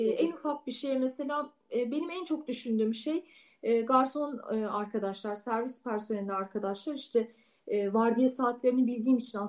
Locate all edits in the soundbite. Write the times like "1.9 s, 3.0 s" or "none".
none